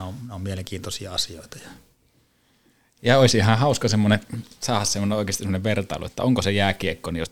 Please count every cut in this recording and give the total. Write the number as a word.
zero